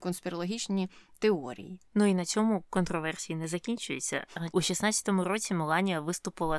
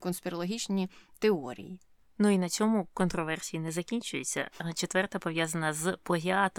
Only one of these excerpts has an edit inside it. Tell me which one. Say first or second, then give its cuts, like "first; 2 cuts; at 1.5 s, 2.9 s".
first; 2 cuts; at 1.9 s, 4.5 s